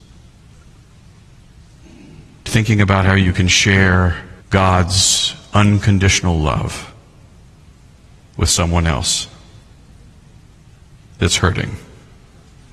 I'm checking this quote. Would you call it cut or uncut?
cut